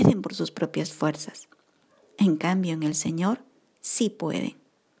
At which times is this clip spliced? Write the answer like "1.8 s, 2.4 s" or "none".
none